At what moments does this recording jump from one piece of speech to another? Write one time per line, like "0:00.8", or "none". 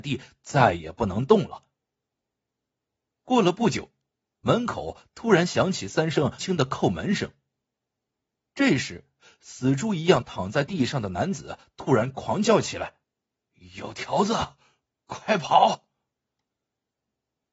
0:06.4
0:13.0